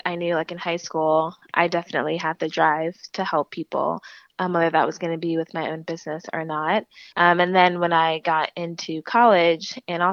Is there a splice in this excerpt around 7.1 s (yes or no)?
yes